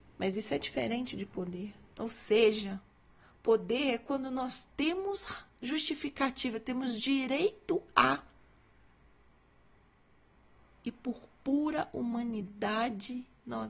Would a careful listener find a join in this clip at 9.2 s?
no; 1 cut; at 1.9 s

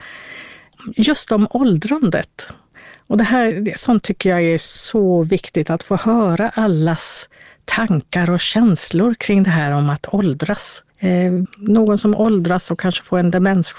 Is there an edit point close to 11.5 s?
yes; 1 cut; at 11.5 s

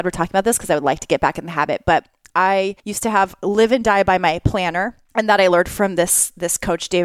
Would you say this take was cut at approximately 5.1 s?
yes; 2 cuts; at 2.8 s, 5.1 s

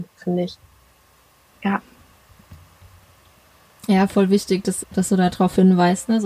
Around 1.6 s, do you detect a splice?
no; 1 cut; at 4.8 s

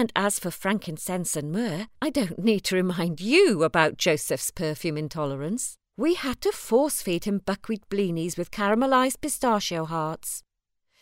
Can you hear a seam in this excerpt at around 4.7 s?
no; 2 cuts; at 2.0 s, 5.9 s

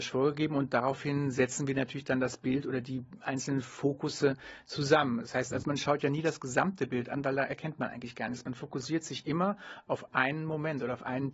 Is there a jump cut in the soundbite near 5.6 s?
yes; 1 cut; at 5.6 s

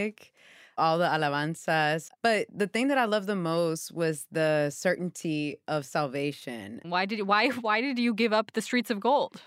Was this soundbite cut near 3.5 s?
no; 2 cuts; at 2.1 s, 6.8 s

